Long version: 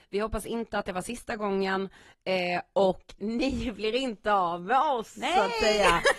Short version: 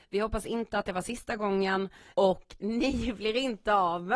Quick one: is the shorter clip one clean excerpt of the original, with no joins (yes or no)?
no